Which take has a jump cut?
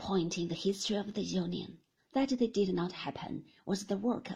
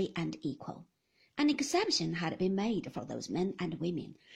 first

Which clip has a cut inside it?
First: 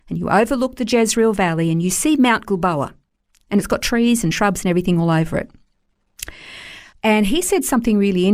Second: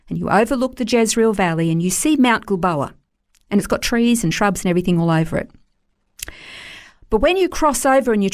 first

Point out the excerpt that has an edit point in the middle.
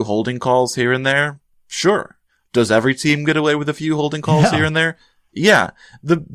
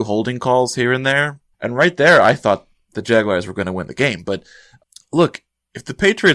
second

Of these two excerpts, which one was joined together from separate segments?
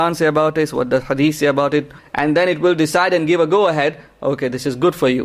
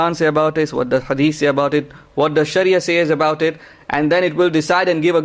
first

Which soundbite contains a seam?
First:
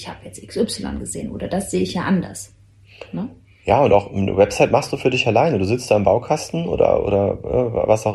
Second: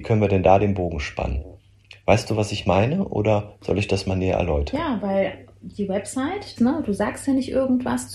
second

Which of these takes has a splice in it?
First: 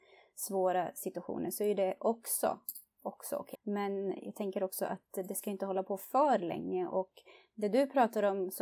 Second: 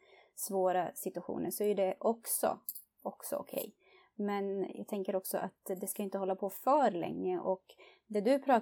first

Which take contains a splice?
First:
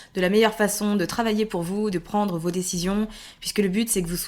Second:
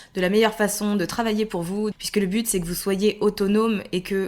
second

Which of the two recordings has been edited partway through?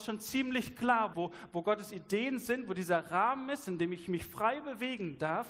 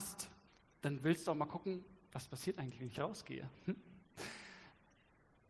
first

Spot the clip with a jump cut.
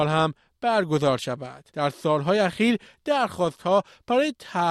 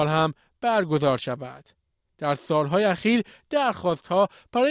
first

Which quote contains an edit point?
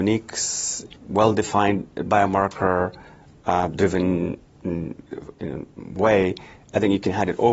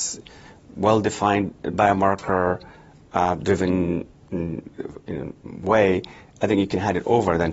first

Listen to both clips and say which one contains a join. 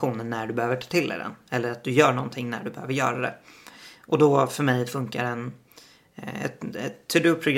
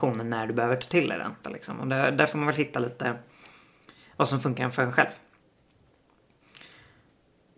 second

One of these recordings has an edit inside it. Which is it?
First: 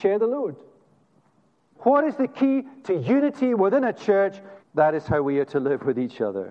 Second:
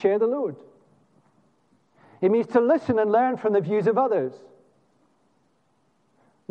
first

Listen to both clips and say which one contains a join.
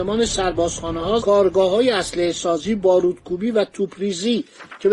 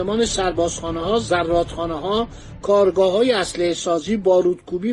first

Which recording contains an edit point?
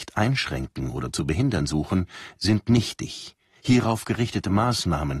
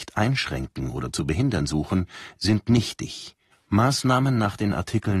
second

